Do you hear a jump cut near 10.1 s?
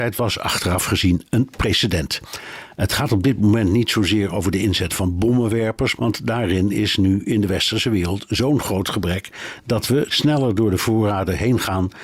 yes; 2 cuts; at 6.0 s, 10.1 s

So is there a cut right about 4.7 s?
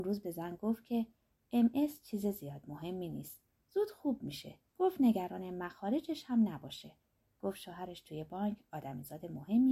yes; 1 cut; at 4.7 s

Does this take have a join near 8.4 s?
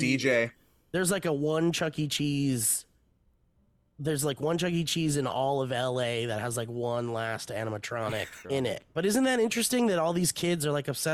yes; 1 cut; at 8.4 s

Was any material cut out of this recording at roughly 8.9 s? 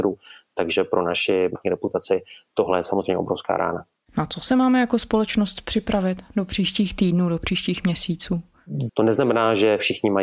yes; 2 cuts; at 1.5 s, 8.9 s

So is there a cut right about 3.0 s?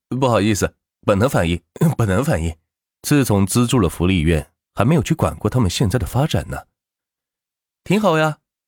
yes; 1 cut; at 3.0 s

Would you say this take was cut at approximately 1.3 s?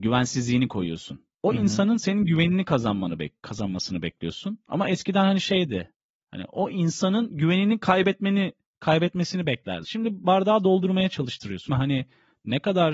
no; 2 cuts; at 9.8 s, 11.7 s

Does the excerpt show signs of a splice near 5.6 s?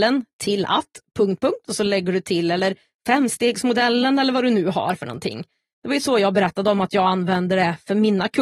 no; 1 cut; at 1.4 s

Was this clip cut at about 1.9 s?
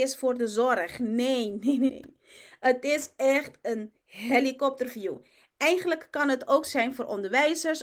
yes; 1 cut; at 1.9 s

